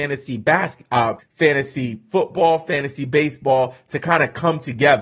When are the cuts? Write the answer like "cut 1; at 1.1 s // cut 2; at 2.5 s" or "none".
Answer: cut 1; at 1.2 s